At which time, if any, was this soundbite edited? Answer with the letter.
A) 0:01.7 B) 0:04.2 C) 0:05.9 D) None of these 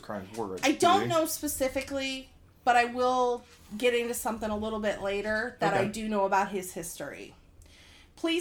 D